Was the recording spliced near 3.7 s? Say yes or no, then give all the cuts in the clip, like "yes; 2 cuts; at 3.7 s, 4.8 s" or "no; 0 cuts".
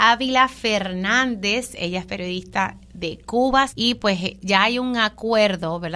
yes; 1 cut; at 3.7 s